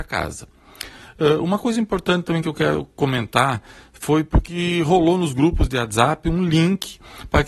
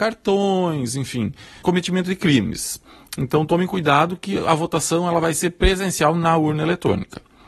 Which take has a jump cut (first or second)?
second